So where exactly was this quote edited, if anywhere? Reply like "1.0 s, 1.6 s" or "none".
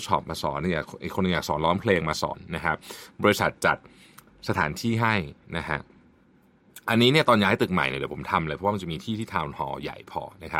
none